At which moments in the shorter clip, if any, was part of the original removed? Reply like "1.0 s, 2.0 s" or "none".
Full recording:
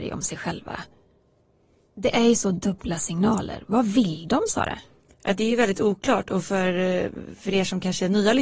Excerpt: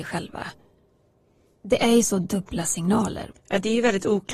3.3 s